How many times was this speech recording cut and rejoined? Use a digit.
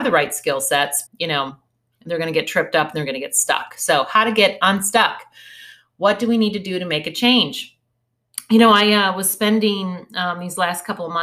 1